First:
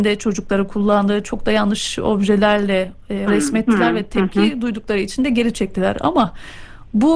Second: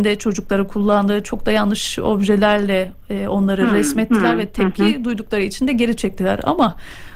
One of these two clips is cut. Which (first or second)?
first